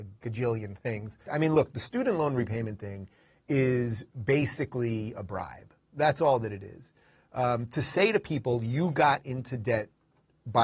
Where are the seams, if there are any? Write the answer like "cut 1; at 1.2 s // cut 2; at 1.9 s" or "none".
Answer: cut 1; at 1.3 s